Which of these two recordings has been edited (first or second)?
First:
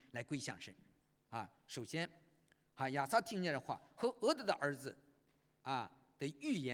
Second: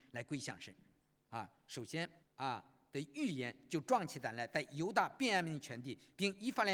second